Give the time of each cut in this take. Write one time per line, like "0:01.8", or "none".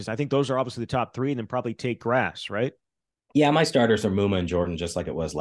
none